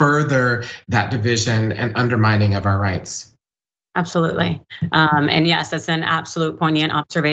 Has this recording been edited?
no; 0 cuts

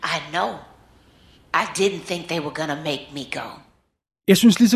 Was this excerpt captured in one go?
yes; 0 cuts

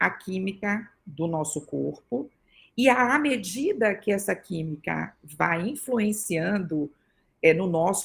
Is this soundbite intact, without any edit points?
yes; 0 cuts

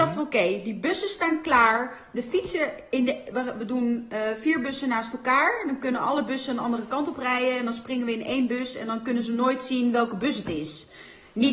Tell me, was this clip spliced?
no; 0 cuts

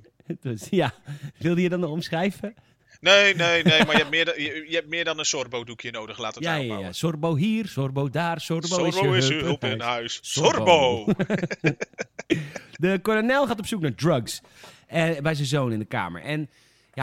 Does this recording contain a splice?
no; 0 cuts

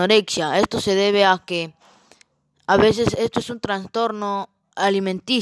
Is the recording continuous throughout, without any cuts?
yes; 0 cuts

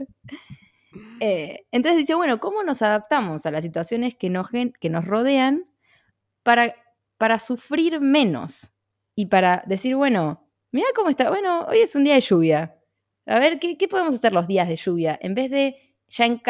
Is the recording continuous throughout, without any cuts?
yes; 0 cuts

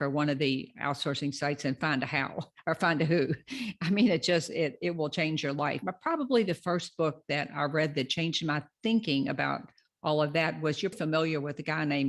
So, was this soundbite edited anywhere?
yes; 2 cuts; at 5.8 s, 10.9 s

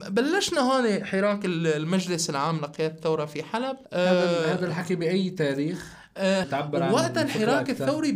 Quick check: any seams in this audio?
yes; 2 cuts; at 3.8 s, 6.4 s

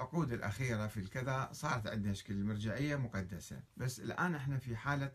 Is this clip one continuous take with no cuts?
no; 1 cut; at 3.7 s

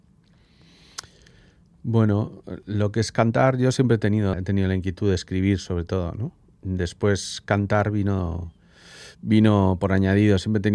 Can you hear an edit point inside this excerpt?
yes; 1 cut; at 4.3 s

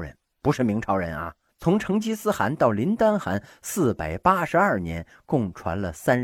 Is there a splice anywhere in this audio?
yes; 1 cut; at 1.5 s

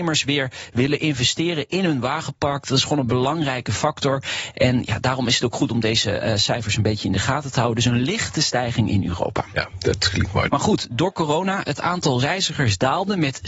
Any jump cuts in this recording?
yes; 1 cut; at 10.5 s

